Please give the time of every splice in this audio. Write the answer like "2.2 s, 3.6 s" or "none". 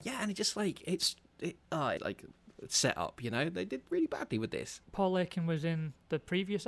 2.0 s